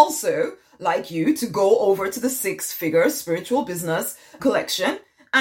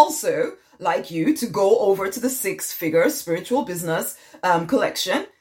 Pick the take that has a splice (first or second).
first